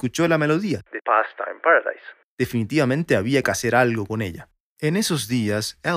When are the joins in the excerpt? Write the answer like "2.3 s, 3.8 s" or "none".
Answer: 4.6 s